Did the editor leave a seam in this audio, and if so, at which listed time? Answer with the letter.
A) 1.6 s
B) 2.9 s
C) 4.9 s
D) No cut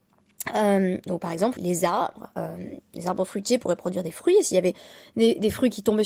A